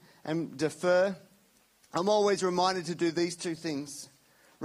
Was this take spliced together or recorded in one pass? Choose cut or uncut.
uncut